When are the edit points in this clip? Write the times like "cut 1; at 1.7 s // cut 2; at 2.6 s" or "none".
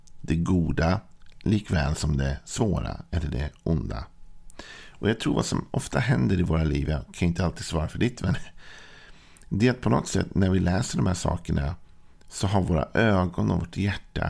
cut 1; at 6.9 s